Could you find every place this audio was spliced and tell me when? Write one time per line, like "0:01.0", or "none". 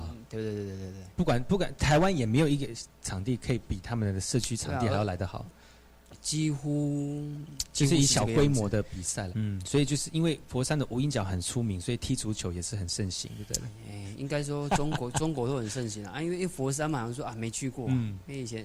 0:09.3